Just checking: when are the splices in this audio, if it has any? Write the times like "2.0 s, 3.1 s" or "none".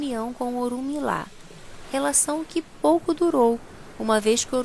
1.8 s